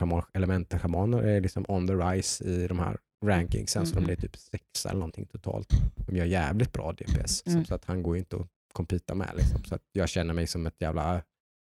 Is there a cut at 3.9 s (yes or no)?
no